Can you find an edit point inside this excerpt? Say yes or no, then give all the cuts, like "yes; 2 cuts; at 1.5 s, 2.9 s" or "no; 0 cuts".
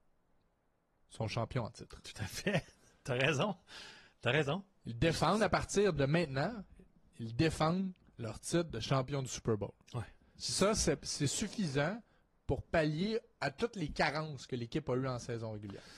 no; 0 cuts